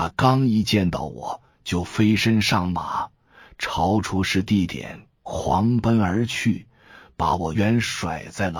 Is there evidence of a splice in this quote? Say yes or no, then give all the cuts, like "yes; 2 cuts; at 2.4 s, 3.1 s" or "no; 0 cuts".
yes; 1 cut; at 7.5 s